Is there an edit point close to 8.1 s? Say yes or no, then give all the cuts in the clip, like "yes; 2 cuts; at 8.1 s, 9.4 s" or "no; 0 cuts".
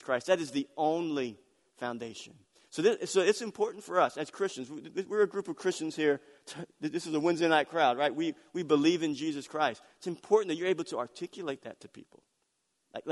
no; 0 cuts